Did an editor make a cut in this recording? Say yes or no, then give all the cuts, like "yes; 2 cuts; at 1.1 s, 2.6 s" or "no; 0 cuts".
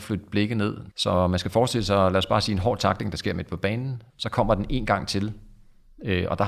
yes; 2 cuts; at 0.9 s, 4.1 s